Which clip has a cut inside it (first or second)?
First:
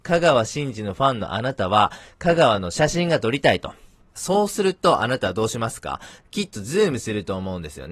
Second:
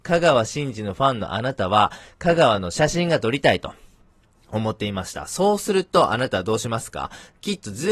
first